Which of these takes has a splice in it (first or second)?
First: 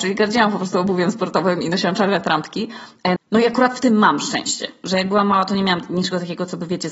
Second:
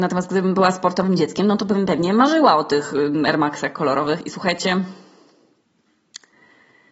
first